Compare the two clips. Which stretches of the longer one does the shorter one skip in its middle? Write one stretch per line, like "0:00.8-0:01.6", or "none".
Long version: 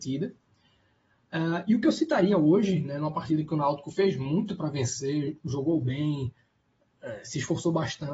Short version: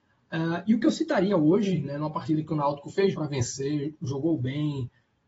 0:04.1-0:04.6